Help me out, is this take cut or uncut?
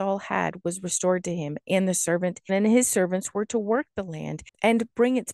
cut